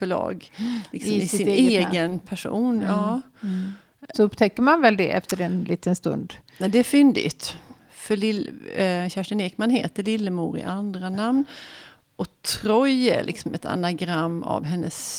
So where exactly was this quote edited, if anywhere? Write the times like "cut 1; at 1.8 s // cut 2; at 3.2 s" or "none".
cut 1; at 4.1 s